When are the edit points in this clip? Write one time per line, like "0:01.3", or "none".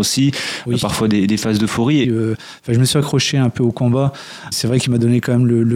0:02.0
0:04.5

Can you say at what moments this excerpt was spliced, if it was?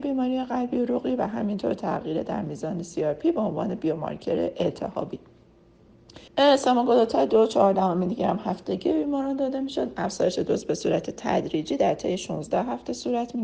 0:06.3

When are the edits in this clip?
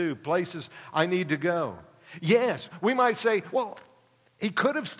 none

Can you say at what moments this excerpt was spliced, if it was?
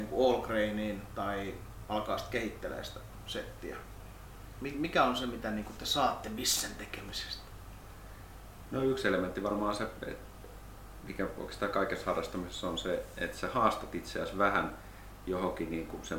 none

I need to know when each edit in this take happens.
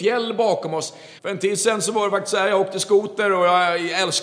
0:01.2

